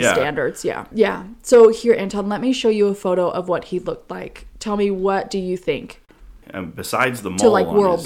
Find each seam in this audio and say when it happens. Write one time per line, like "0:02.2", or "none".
0:00.9
0:06.4